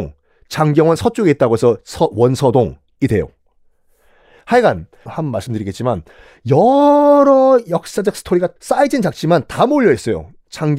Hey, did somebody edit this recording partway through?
yes; 2 cuts; at 5.1 s, 8.6 s

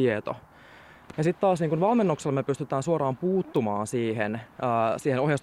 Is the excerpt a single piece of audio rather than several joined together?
no; 1 cut; at 1.1 s

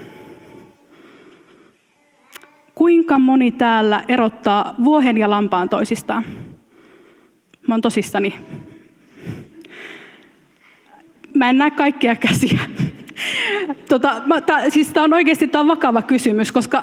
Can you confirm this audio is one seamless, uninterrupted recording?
yes; 0 cuts

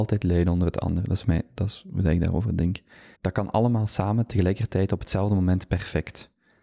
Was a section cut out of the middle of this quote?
yes; 1 cut; at 3.1 s

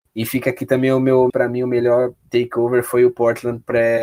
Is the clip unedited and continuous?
no; 1 cut; at 1.3 s

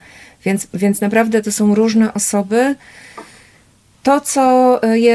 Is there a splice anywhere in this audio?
no; 0 cuts

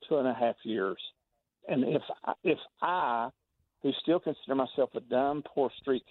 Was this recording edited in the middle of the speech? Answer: yes; 1 cut; at 1.6 s

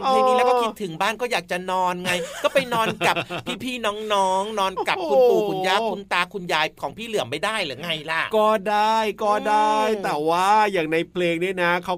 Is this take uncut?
yes; 0 cuts

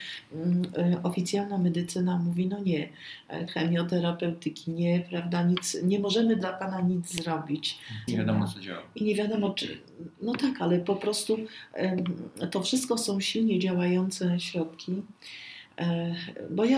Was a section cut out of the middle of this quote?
yes; 2 cuts; at 3.5 s, 8.1 s

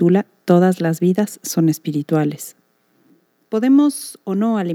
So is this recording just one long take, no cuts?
no; 1 cut; at 3.5 s

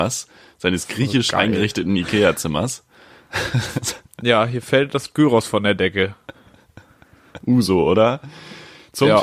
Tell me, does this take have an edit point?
yes; 1 cut; at 7.4 s

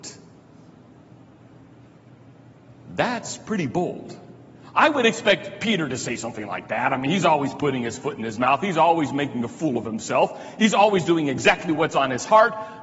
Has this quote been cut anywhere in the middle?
no; 0 cuts

